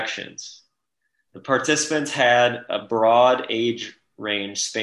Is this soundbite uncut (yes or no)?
no